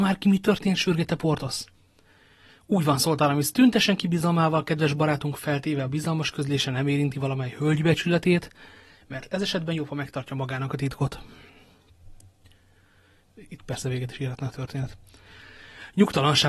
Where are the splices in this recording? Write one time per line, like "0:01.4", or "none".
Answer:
none